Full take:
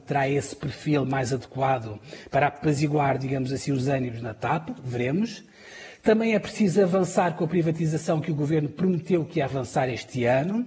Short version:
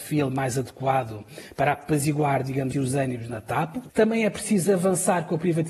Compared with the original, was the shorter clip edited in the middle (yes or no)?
yes